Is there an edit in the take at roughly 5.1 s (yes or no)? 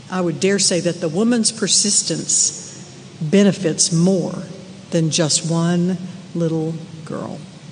no